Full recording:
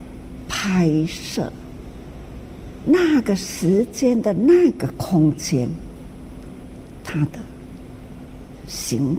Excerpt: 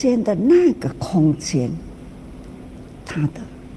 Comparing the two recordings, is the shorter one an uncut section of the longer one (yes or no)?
yes